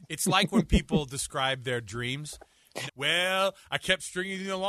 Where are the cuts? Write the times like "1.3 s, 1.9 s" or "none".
2.9 s